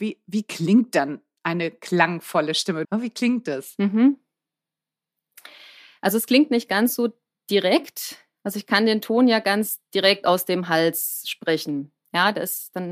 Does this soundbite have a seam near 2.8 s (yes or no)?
yes